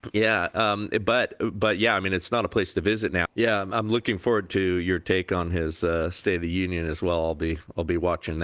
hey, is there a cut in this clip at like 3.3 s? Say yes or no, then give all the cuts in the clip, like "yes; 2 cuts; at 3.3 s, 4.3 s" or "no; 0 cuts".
yes; 1 cut; at 3.3 s